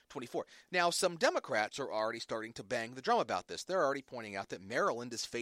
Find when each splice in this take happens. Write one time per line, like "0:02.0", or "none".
0:01.7